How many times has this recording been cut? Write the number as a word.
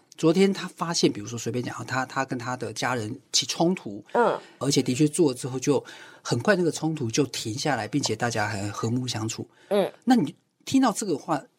one